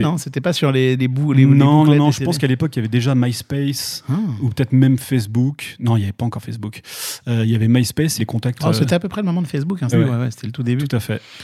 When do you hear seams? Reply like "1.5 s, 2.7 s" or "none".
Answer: 8.2 s, 9.9 s